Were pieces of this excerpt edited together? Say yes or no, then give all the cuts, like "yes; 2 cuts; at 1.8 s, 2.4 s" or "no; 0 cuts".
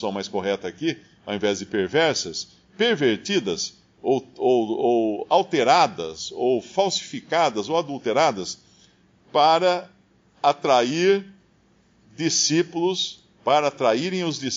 no; 0 cuts